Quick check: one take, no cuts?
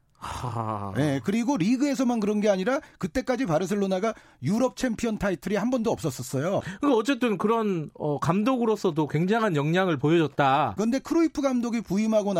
no; 2 cuts; at 6.6 s, 10.8 s

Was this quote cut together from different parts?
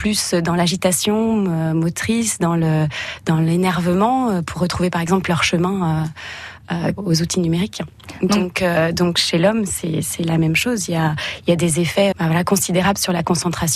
yes; 2 cuts; at 7.0 s, 12.1 s

